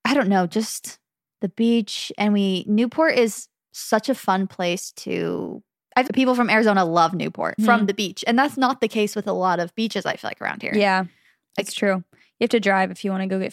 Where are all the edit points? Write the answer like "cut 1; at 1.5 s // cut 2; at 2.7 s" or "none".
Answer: cut 1; at 6.1 s // cut 2; at 7.6 s

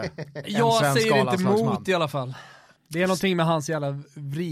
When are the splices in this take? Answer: cut 1; at 2.7 s

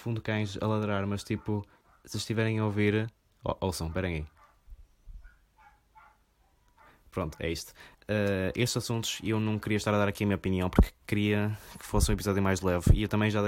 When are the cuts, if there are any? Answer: cut 1; at 7.9 s

